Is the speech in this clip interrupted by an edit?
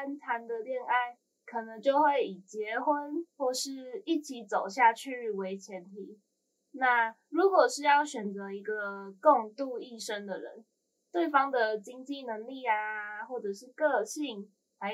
no; 0 cuts

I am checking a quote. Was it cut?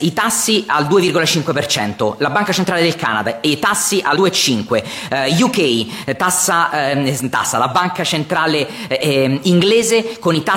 yes; 1 cut; at 4.2 s

